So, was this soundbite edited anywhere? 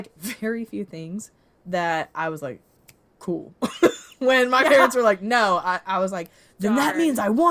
no; 0 cuts

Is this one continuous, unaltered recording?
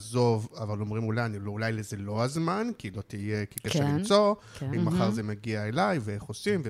no; 1 cut; at 4.7 s

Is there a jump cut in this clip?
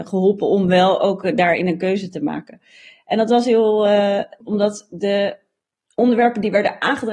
yes; 1 cut; at 4.4 s

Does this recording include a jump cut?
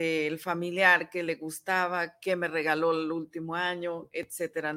no; 0 cuts

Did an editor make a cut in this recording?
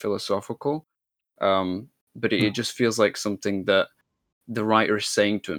no; 0 cuts

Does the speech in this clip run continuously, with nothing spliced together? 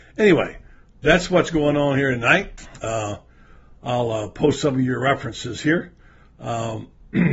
yes; 0 cuts

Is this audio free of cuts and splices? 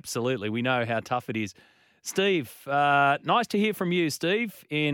yes; 0 cuts

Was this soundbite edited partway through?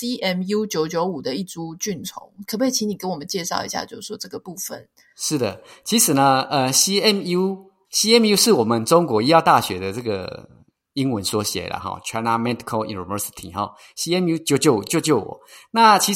no; 0 cuts

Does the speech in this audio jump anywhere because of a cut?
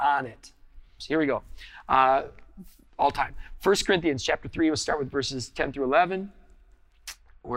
yes; 1 cut; at 1.0 s

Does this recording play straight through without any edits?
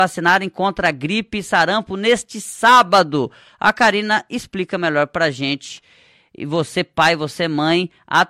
yes; 0 cuts

